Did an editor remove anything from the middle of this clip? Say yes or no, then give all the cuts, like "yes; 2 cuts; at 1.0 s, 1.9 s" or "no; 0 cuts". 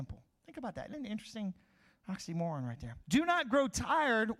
yes; 1 cut; at 3.0 s